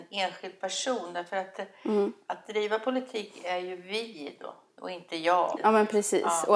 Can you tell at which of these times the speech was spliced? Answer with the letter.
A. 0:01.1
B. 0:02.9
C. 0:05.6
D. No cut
C